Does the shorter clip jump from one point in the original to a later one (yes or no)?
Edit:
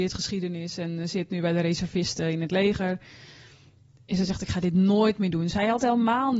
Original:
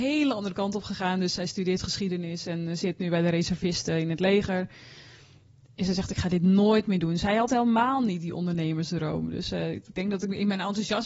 no